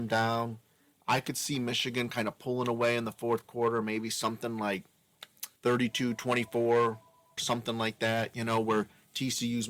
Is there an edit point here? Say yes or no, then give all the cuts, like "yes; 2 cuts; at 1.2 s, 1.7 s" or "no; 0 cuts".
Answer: yes; 2 cuts; at 5.6 s, 7.4 s